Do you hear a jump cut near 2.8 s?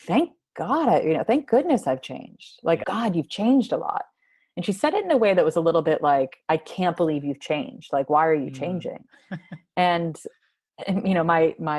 yes; 1 cut; at 2.8 s

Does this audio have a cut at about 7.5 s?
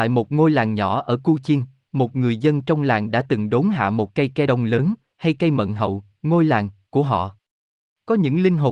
no; 2 cuts; at 4.5 s, 6.1 s

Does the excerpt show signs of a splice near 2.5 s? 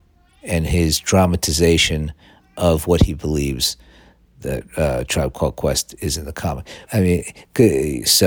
no; 1 cut; at 6.9 s

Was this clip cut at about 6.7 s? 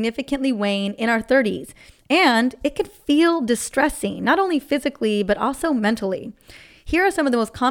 no; 0 cuts

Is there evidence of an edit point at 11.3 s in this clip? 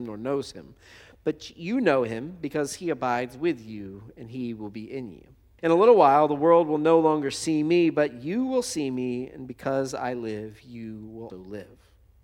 yes; 2 cuts; at 5.6 s, 11.3 s

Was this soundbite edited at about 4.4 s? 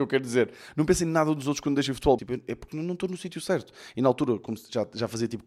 no; 1 cut; at 2.2 s

